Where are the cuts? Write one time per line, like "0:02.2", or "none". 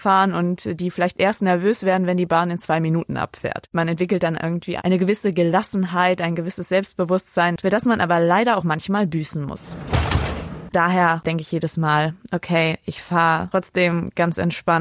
0:07.6
0:10.7